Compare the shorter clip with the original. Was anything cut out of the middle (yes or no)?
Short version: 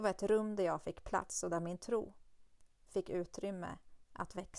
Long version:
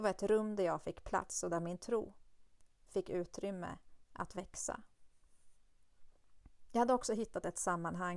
no